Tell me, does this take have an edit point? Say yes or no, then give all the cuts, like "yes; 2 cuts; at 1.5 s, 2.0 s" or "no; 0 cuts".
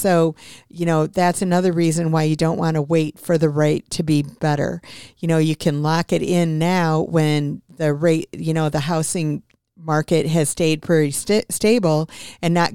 no; 0 cuts